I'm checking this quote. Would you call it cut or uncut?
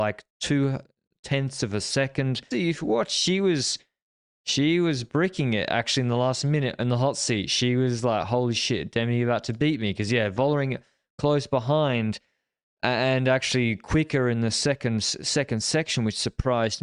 cut